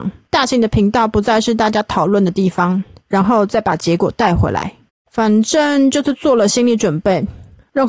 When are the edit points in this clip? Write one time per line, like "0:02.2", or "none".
0:02.9